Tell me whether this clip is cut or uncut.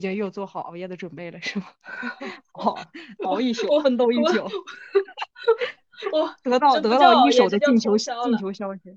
uncut